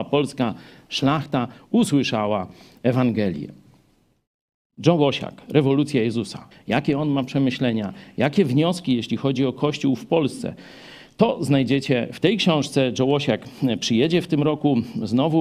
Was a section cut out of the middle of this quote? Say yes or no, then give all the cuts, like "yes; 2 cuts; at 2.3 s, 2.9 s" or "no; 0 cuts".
yes; 1 cut; at 6.5 s